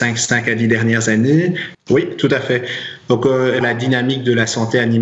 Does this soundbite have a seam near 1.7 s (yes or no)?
yes